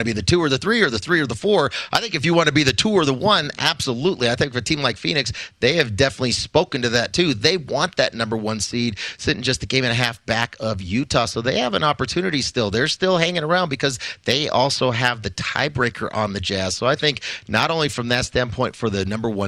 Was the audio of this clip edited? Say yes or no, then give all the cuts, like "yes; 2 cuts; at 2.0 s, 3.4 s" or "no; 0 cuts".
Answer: no; 0 cuts